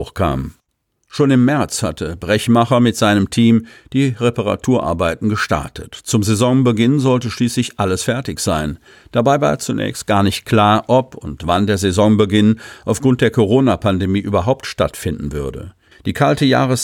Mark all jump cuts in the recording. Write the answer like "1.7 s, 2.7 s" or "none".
15.9 s